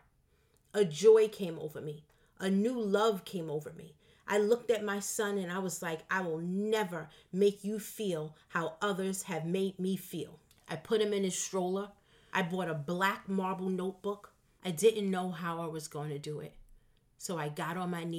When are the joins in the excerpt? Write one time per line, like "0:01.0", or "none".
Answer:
0:12.3
0:14.6